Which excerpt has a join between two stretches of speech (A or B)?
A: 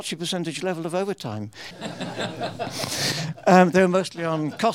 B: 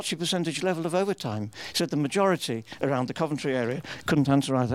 A